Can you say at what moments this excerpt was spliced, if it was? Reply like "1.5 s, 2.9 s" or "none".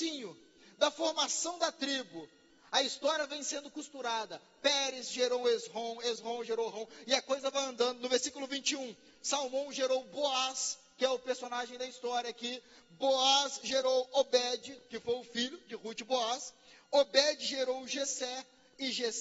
none